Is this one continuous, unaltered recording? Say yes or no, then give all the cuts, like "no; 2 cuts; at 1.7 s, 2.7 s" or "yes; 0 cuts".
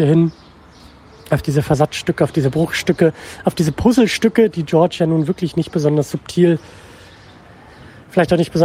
yes; 0 cuts